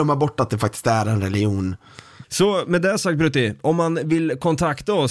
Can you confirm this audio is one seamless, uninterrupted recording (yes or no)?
no